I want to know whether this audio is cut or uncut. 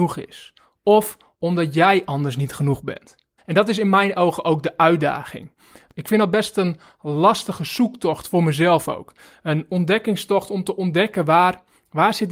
cut